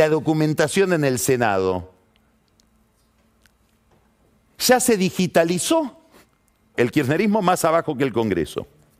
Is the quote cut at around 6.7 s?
yes; 1 cut; at 6.7 s

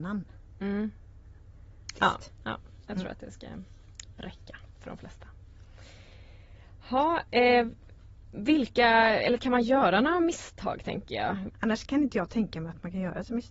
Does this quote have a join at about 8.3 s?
no; 2 cuts; at 1.9 s, 11.5 s

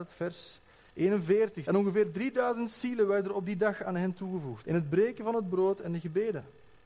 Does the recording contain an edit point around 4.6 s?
yes; 2 cuts; at 1.6 s, 4.6 s

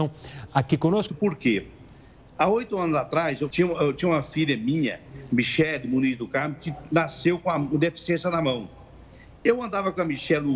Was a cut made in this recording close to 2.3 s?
no; 2 cuts; at 1.1 s, 3.5 s

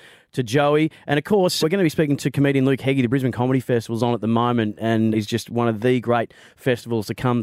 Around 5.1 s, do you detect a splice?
yes; 2 cuts; at 1.6 s, 5.1 s

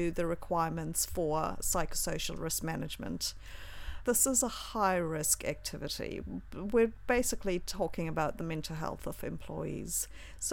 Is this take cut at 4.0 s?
yes; 1 cut; at 4.0 s

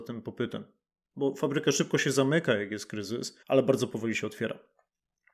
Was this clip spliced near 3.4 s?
yes; 1 cut; at 3.4 s

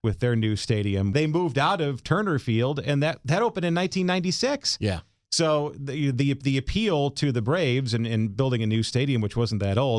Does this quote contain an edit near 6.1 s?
yes; 1 cut; at 6.1 s

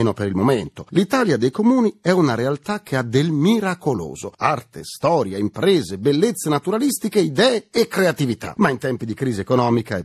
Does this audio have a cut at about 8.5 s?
no; 1 cut; at 4.3 s

